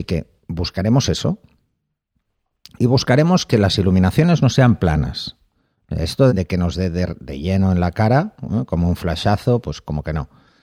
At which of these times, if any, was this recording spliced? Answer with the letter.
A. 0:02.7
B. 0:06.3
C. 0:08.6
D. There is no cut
B